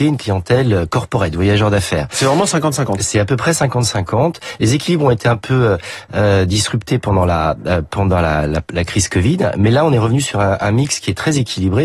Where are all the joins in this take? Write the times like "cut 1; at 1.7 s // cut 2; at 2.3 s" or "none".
none